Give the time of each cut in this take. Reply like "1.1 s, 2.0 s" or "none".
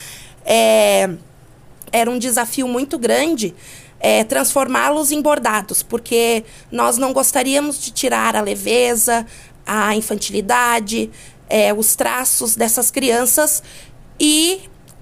1.9 s